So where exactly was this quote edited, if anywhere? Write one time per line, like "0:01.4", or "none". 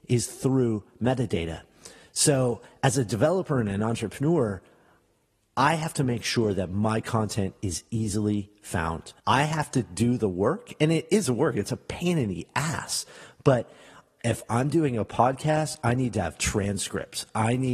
0:09.2